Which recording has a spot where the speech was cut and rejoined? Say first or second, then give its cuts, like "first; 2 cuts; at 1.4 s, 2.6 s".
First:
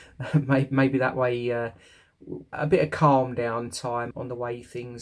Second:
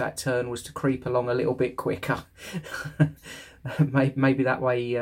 first; 2 cuts; at 2.5 s, 4.1 s